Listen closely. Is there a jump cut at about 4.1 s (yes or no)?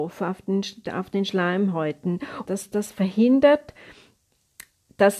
no